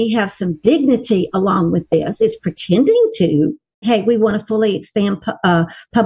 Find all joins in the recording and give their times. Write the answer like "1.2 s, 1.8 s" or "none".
3.8 s